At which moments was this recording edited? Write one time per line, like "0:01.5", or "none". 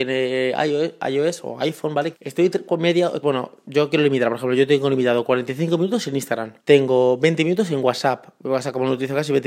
0:02.1
0:03.2
0:06.6